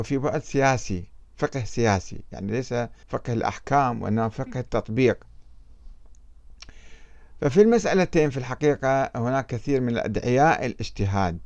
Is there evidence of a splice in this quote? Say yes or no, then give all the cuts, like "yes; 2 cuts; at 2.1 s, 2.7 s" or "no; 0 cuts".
yes; 1 cut; at 3.0 s